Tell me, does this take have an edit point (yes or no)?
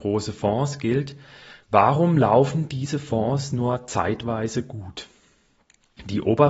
yes